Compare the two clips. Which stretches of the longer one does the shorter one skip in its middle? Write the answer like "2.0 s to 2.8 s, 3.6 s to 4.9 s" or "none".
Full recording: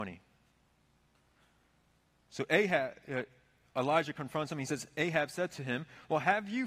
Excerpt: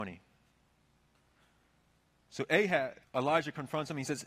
3.0 s to 3.6 s